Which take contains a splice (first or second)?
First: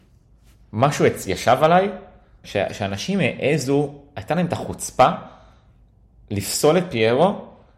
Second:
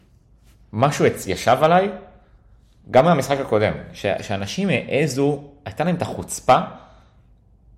first